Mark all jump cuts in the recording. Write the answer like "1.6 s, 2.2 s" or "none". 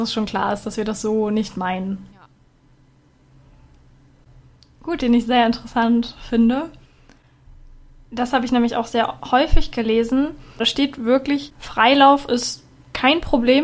2.1 s, 5.0 s